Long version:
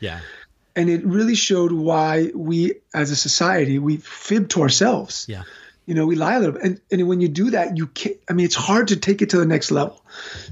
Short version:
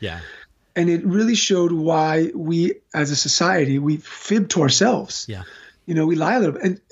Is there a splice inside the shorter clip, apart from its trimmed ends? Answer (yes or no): no